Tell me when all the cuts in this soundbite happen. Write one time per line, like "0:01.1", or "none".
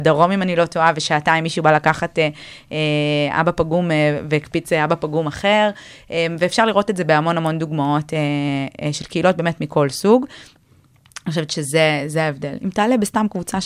none

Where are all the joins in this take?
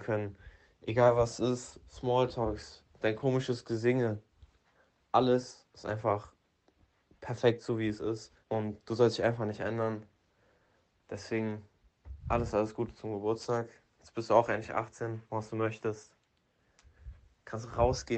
0:08.4
0:15.3

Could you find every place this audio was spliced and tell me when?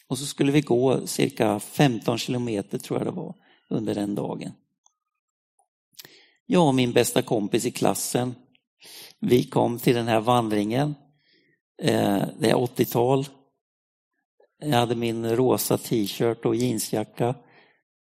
none

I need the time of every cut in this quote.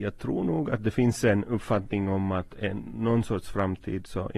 none

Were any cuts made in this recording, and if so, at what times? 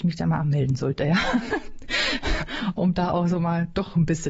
none

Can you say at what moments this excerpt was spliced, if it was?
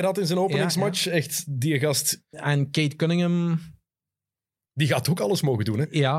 0:02.3

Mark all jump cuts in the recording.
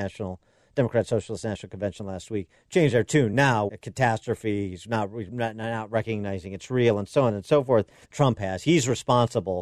0:03.7
0:08.0

